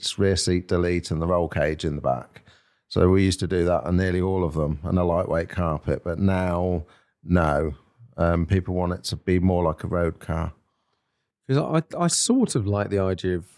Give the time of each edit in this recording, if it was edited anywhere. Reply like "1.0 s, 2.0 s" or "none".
none